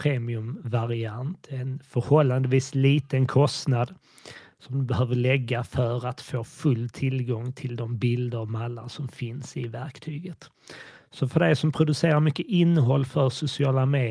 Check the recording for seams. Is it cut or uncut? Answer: uncut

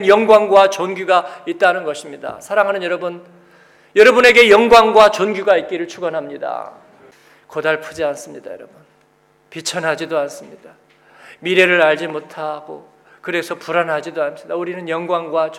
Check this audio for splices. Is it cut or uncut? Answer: uncut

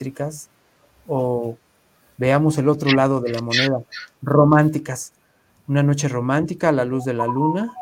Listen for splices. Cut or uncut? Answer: uncut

